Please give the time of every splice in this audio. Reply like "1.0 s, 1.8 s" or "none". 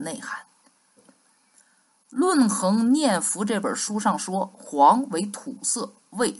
1.0 s